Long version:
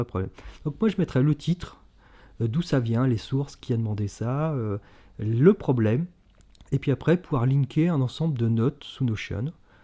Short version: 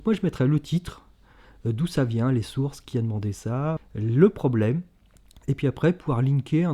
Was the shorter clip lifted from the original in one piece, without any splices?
no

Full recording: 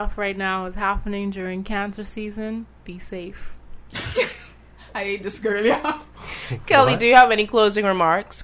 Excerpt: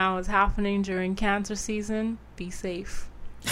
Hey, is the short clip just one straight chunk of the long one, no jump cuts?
yes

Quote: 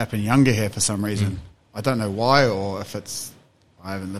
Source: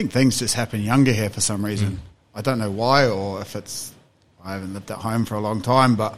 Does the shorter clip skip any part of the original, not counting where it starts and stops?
no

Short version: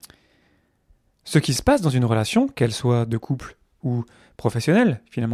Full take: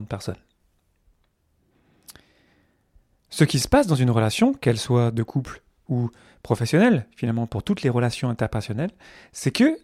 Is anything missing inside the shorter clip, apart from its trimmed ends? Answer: no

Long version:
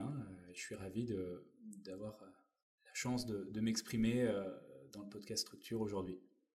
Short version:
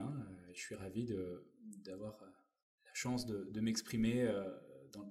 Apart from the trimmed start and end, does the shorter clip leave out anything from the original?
no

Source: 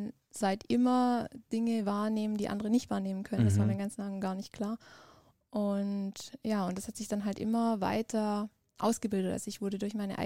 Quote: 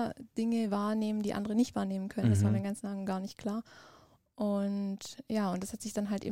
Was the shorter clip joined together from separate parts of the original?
no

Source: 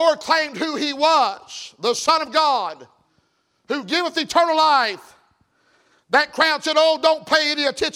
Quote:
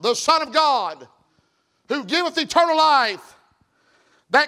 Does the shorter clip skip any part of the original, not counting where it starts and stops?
no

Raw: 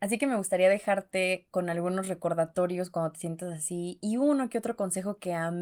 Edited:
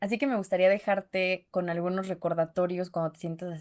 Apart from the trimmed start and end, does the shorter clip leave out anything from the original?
no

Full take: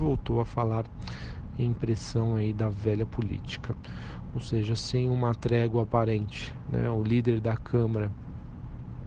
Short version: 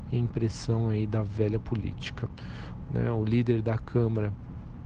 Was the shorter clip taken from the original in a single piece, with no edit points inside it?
no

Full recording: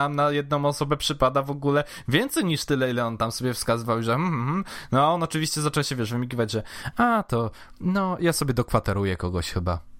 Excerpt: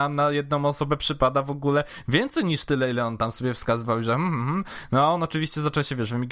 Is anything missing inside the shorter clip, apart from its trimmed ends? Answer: no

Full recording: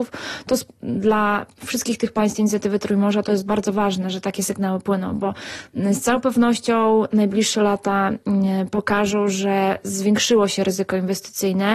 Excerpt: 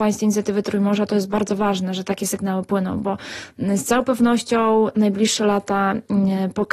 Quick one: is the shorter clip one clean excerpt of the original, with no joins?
yes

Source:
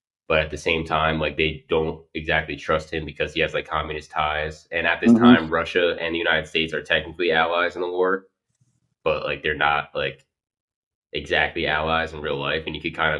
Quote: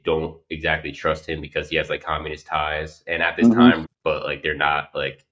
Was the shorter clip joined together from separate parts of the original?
yes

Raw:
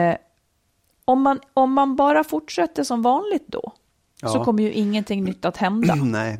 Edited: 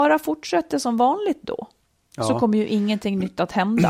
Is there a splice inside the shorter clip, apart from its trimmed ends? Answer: no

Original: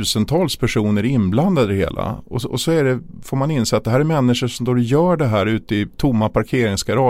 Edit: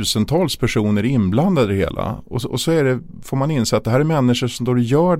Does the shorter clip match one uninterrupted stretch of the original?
yes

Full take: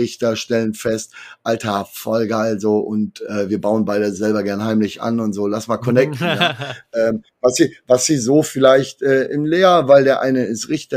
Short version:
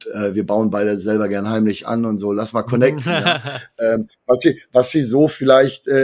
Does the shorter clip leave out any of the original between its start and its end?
no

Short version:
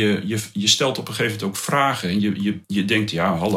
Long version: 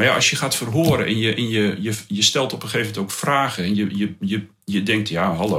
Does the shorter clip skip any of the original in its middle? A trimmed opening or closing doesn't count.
yes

